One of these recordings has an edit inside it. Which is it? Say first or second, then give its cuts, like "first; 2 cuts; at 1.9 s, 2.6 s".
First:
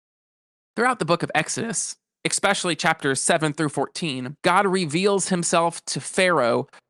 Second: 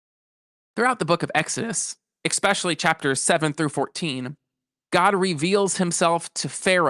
first; 1 cut; at 4.4 s